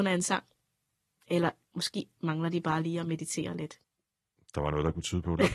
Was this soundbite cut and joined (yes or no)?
no